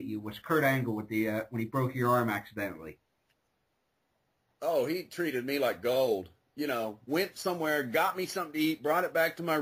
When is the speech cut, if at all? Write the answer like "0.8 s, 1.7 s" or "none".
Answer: 7.1 s